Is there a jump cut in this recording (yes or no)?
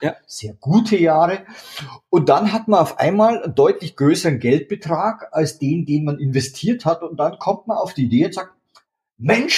no